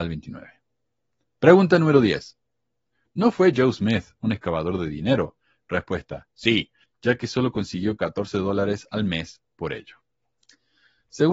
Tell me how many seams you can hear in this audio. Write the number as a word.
one